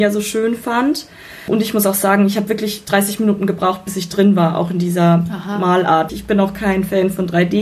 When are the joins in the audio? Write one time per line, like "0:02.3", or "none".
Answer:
0:06.1

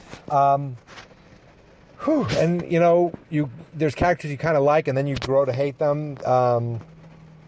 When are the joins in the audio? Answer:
none

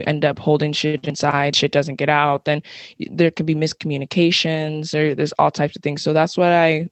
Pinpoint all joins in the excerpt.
none

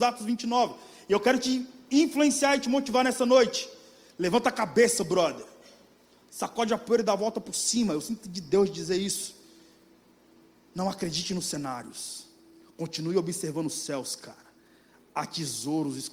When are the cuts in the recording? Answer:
none

